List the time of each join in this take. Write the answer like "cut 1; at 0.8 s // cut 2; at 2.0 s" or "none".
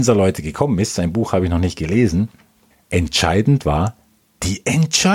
cut 1; at 2.7 s